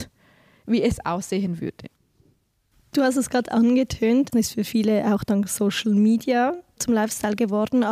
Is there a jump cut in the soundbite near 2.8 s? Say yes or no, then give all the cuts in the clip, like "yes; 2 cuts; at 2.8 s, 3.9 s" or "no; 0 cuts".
no; 1 cut; at 4.3 s